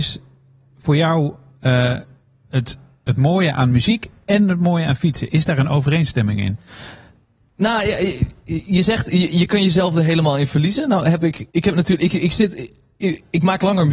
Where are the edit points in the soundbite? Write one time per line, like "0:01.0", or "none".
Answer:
0:11.5